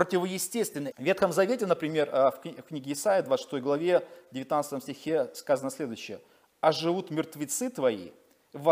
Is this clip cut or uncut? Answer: cut